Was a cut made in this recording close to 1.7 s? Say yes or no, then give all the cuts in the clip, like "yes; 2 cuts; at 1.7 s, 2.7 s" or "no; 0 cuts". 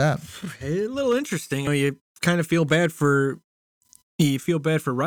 yes; 1 cut; at 1.7 s